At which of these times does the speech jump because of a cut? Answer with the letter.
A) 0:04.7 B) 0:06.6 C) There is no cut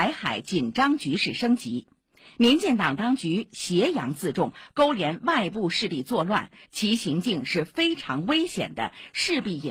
B